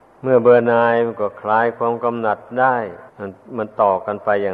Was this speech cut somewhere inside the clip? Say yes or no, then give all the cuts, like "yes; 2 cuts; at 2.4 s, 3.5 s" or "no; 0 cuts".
yes; 1 cut; at 3.1 s